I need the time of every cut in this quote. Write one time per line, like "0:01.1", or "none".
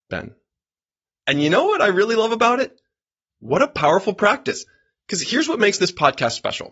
0:01.1
0:03.3